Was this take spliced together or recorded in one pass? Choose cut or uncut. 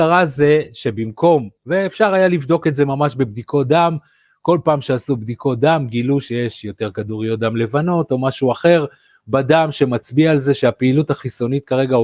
uncut